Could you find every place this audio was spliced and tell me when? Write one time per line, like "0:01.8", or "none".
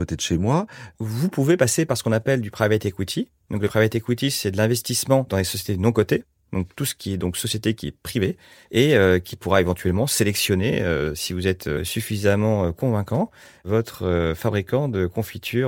0:00.9